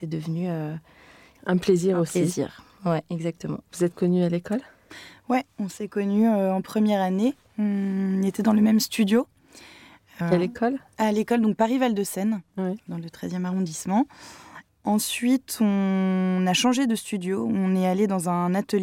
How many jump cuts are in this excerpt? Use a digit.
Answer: 0